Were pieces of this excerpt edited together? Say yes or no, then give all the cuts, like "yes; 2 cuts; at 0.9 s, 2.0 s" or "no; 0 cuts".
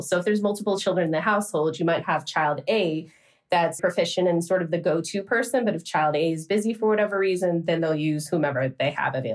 yes; 1 cut; at 3.8 s